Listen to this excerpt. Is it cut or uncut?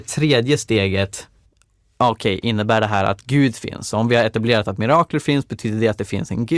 uncut